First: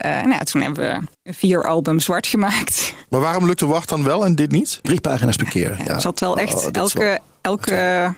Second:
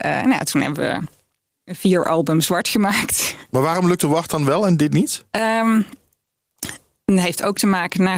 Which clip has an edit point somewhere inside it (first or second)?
first